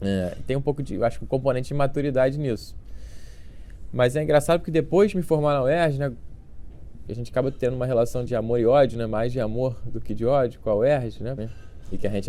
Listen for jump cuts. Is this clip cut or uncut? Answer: cut